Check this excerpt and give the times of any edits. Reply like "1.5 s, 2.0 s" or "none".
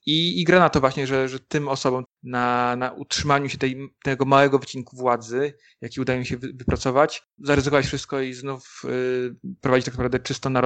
2.0 s, 7.4 s